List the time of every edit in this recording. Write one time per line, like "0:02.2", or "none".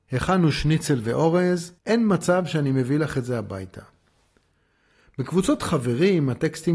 0:01.8